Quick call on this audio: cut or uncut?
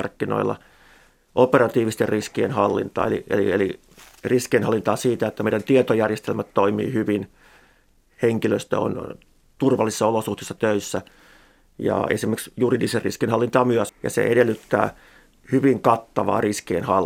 cut